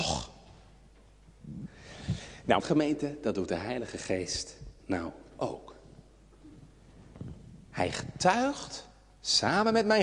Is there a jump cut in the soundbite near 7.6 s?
no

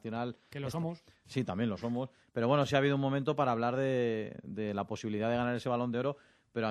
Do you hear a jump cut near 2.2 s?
yes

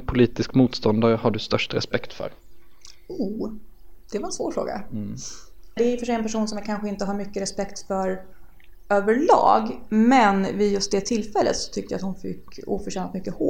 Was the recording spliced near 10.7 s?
no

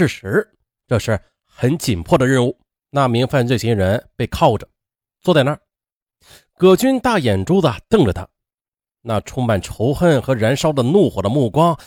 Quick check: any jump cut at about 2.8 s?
yes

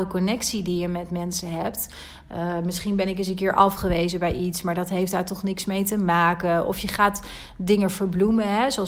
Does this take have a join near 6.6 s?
no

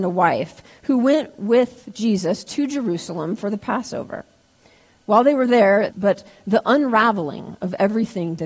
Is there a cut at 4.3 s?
no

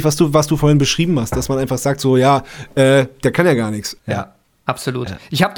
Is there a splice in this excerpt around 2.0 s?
no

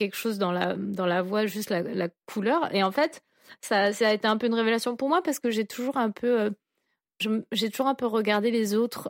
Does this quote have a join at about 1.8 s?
no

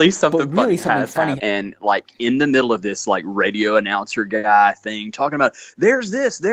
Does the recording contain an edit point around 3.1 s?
no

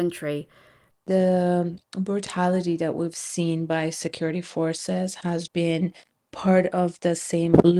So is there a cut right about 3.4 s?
no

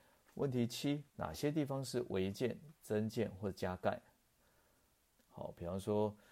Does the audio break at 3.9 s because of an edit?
no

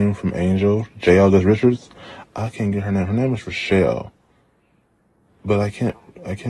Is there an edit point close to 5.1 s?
no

